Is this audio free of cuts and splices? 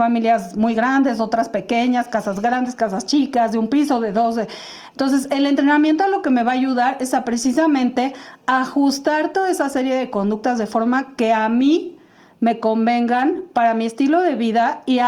yes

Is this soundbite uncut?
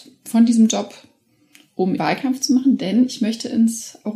no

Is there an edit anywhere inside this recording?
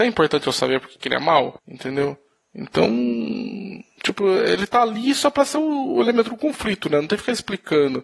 no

